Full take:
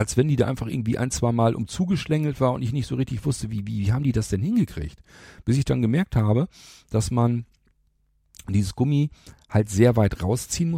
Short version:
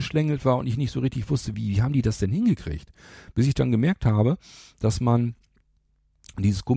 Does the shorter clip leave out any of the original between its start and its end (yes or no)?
yes